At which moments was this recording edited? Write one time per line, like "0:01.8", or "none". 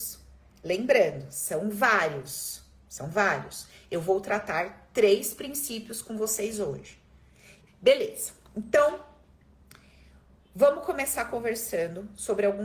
0:07.7